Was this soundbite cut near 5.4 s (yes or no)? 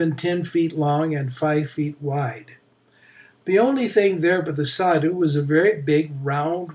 no